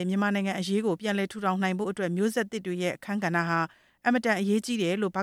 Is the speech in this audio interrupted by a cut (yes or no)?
no